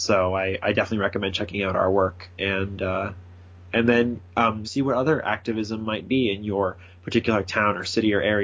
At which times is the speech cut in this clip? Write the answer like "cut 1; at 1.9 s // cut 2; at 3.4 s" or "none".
cut 1; at 4.6 s